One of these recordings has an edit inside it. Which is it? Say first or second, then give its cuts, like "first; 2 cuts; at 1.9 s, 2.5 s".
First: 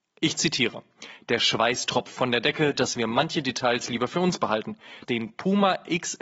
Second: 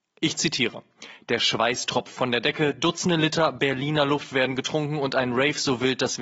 first; 2 cuts; at 2.7 s, 5.0 s